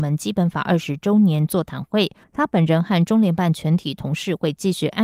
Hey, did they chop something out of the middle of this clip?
yes; 1 cut; at 2.2 s

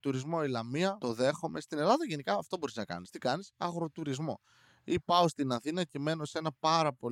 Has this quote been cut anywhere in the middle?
no; 0 cuts

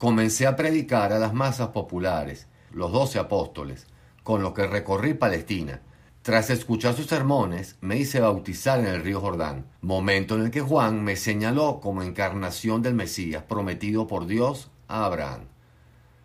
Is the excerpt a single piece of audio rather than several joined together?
no; 3 cuts; at 2.7 s, 6.1 s, 9.8 s

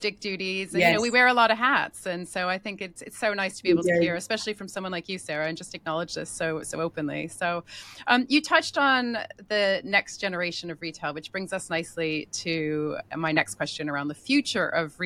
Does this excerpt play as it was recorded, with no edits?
yes; 0 cuts

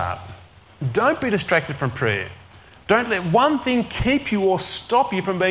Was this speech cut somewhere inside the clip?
no; 0 cuts

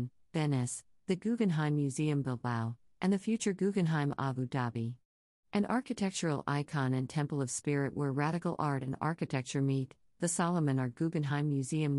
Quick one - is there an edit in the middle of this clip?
yes; 1 cut; at 10.9 s

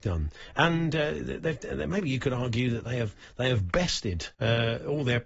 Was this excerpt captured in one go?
no; 1 cut; at 4.3 s

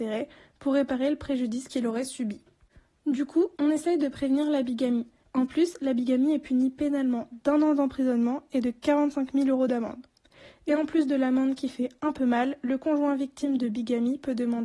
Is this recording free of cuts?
no; 2 cuts; at 3.5 s, 5.2 s

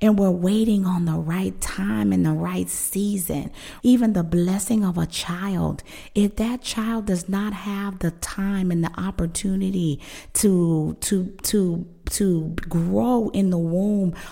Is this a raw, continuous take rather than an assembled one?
no; 1 cut; at 3.8 s

